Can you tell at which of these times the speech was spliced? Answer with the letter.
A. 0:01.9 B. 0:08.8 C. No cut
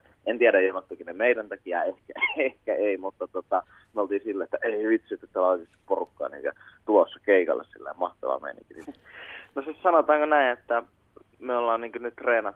B